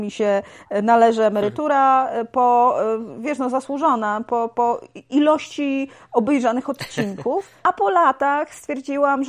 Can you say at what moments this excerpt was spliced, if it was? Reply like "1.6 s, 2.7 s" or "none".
4.5 s, 7.6 s